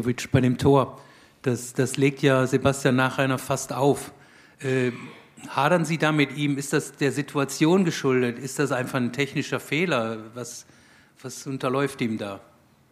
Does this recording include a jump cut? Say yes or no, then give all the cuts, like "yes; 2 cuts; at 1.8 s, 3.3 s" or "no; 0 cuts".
no; 0 cuts